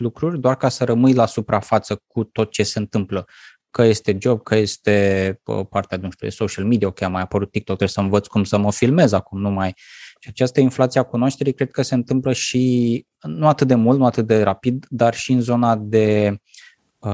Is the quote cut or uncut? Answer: uncut